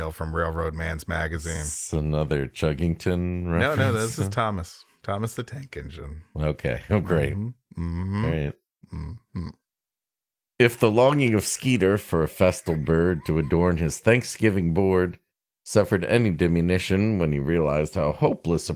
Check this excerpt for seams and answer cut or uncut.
uncut